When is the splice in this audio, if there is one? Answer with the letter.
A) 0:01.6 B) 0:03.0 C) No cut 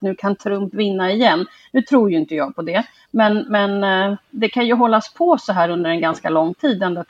C